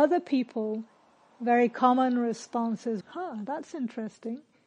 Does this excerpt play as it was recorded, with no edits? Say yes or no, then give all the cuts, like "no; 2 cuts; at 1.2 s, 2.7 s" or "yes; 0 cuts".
no; 1 cut; at 3.0 s